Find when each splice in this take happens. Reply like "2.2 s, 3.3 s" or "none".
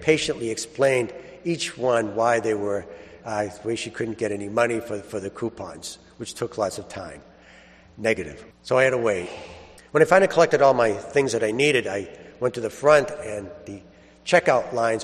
8.5 s, 9.8 s